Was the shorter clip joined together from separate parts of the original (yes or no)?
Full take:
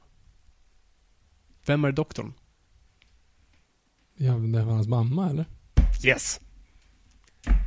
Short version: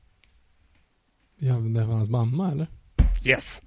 no